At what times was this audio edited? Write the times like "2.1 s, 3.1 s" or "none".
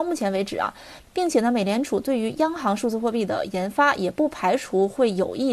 1.1 s